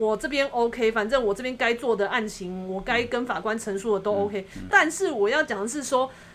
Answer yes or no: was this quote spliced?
yes